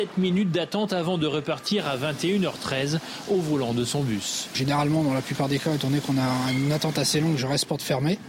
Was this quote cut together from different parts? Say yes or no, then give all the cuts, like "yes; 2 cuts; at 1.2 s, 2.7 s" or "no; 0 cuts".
no; 0 cuts